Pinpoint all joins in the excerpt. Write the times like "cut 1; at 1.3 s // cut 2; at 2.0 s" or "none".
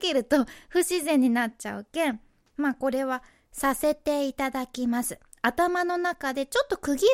none